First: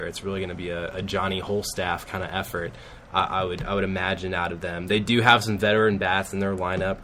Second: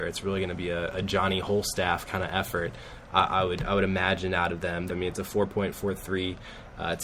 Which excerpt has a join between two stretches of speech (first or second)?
second